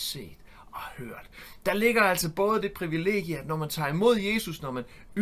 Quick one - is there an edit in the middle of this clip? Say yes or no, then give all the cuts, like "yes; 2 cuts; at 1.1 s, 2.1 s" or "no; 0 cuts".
no; 0 cuts